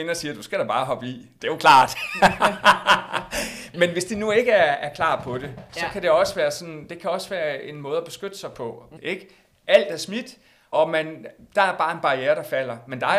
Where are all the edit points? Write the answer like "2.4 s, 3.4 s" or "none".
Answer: 9.0 s, 10.7 s